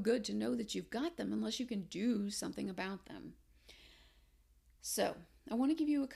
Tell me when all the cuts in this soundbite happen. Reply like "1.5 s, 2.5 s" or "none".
none

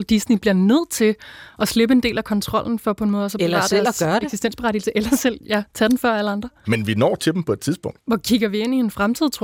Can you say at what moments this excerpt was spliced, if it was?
6.6 s

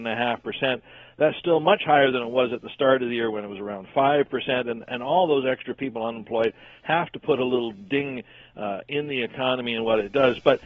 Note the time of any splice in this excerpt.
none

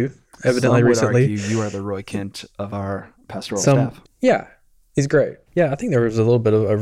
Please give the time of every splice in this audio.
4.0 s, 5.5 s

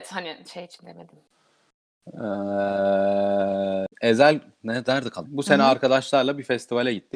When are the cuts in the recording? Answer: 3.9 s, 5.2 s

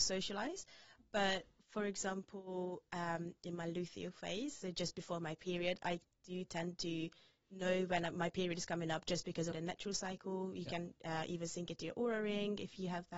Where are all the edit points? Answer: 9.5 s

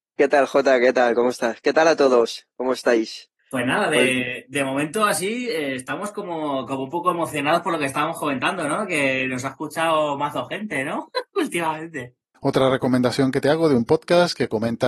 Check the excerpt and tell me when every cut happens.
3.4 s

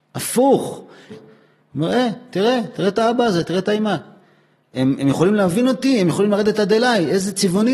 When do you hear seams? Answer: 1.1 s

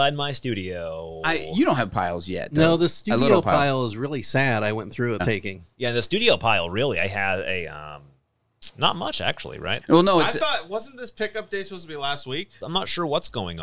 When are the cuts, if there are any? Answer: 5.2 s, 9.8 s, 12.6 s

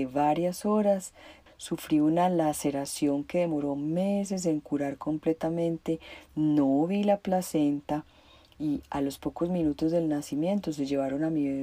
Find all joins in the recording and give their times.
1.5 s

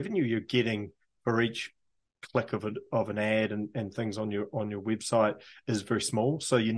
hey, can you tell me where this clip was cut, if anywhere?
none

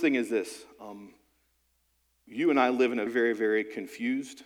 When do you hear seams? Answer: 3.1 s

